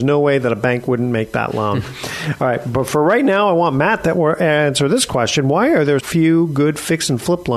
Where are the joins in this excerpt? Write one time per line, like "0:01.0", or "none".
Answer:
0:06.0